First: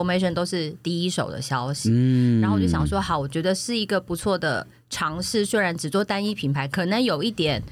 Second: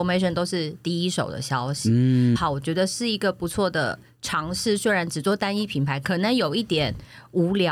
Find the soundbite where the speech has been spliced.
second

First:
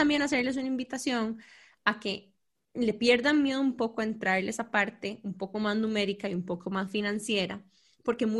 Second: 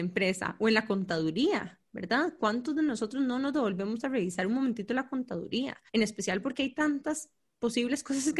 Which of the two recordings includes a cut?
second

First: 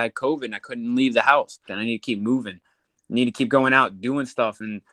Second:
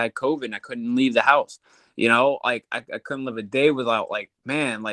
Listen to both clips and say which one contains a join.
first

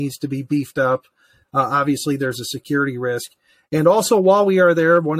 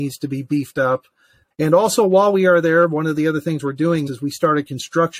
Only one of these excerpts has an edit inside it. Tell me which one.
second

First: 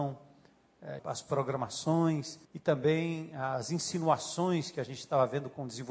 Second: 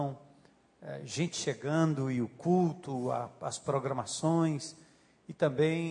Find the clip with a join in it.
first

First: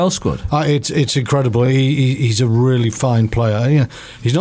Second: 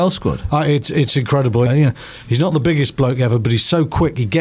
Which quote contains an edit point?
second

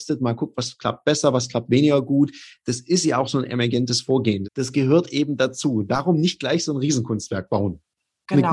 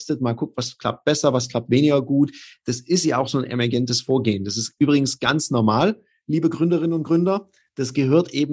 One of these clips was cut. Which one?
first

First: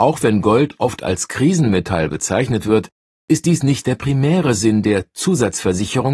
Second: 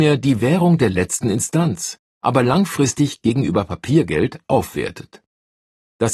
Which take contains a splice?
second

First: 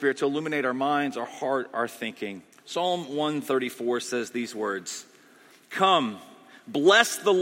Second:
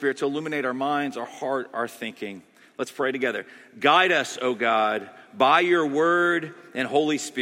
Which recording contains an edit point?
first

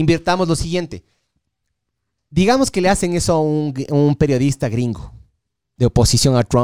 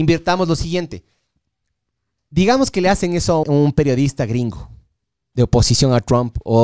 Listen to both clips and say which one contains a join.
second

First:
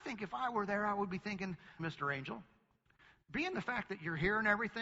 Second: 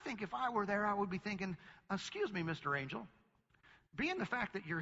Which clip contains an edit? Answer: first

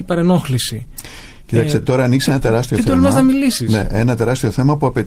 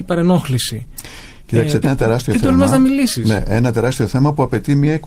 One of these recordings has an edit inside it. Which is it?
second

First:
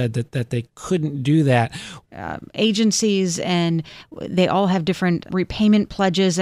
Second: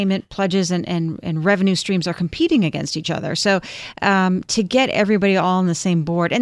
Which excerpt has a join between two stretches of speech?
first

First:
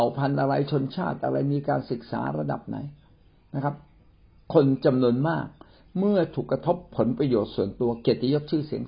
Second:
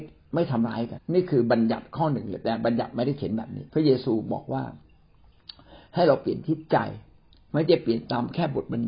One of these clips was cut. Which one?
second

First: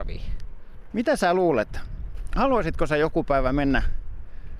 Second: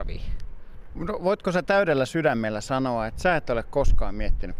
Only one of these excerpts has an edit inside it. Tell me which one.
first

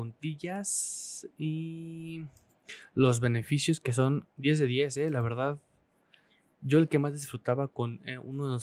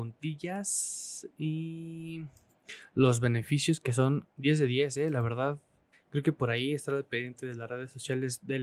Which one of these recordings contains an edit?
second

